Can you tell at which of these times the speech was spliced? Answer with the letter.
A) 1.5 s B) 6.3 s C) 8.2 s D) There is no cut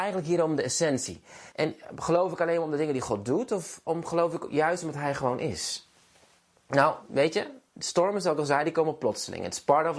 A